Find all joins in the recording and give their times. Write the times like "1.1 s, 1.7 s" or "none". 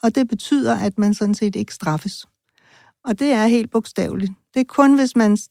none